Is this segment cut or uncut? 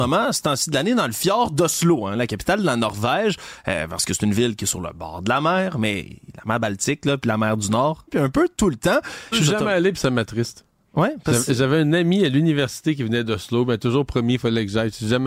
cut